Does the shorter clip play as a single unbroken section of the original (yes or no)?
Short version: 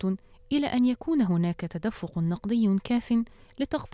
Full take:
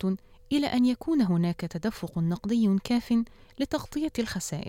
yes